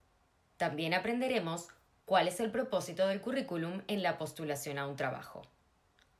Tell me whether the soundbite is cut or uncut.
uncut